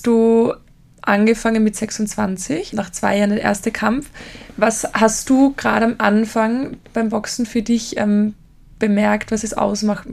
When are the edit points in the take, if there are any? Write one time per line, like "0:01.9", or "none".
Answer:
0:02.7

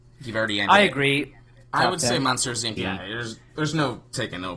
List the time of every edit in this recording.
0:01.7
0:02.8

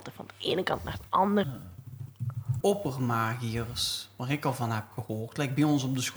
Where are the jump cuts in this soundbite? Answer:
0:01.4
0:02.6

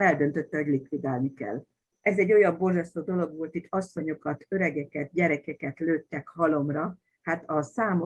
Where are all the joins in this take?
0:01.9

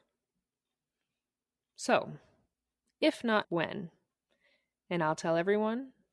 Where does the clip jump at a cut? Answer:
0:03.4

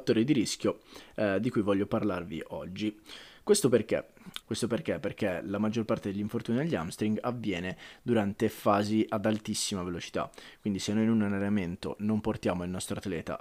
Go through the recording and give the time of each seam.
0:04.4

